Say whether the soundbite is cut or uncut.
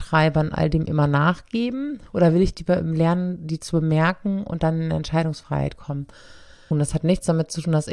cut